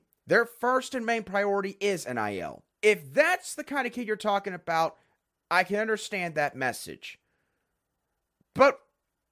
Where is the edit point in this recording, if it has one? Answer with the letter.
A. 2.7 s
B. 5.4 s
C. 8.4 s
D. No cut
A